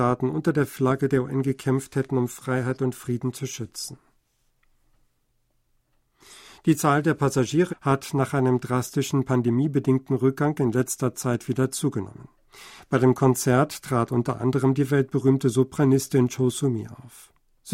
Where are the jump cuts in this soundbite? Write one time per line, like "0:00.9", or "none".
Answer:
0:07.7
0:12.8